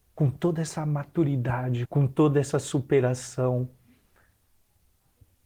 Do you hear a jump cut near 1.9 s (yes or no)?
yes